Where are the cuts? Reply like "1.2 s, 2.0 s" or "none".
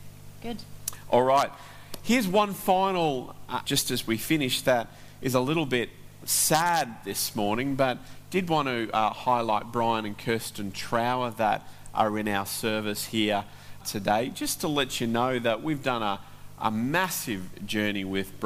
3.6 s, 13.8 s